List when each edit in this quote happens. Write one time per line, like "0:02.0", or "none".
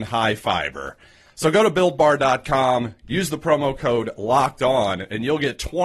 none

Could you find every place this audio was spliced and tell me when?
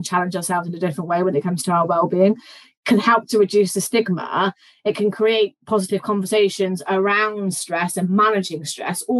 none

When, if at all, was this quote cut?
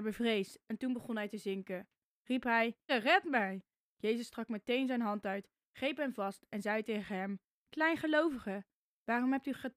0:02.9

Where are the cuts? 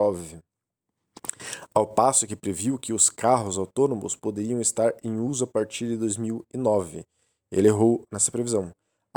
none

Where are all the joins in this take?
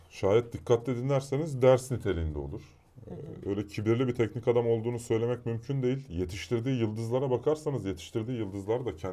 none

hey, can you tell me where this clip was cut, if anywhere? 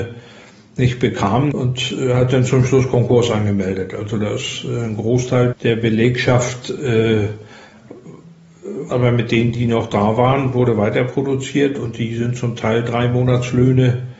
0:01.5
0:05.5
0:08.9

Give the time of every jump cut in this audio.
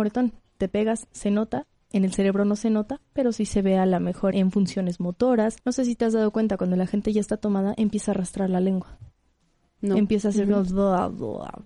0:04.3
0:05.6

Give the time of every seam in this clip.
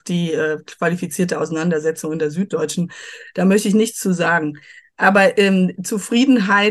none

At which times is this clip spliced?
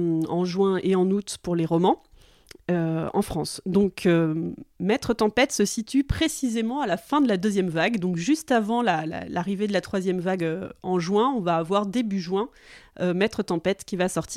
none

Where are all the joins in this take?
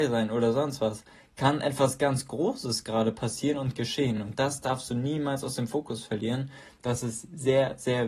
none

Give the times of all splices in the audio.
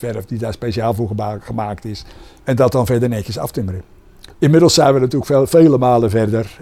0:02.4
0:04.3

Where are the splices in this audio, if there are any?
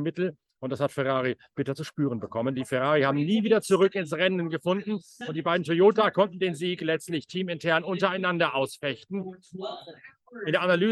none

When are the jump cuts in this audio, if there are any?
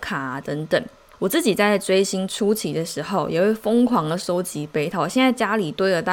0:01.1

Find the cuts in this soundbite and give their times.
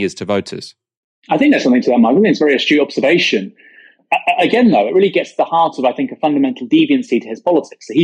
none

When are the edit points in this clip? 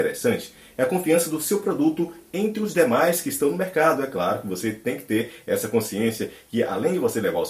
none

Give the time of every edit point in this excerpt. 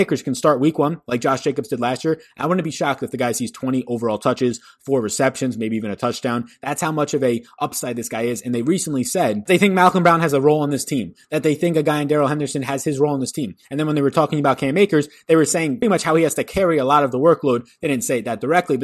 0:15.8

